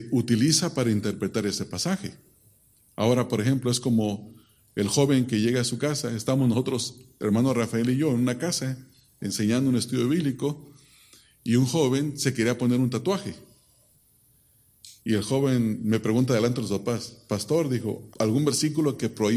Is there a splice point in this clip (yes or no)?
yes